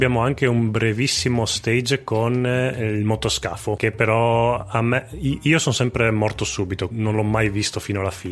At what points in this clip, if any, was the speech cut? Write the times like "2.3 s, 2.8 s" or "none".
6.9 s